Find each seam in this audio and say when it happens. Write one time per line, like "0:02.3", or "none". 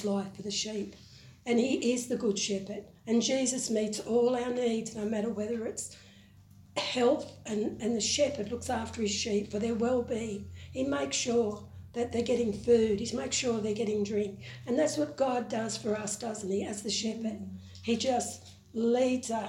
none